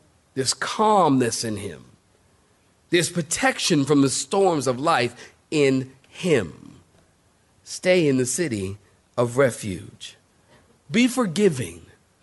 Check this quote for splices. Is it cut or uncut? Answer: uncut